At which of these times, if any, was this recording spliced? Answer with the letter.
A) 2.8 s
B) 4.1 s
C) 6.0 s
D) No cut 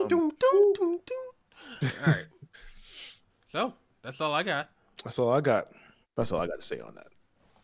C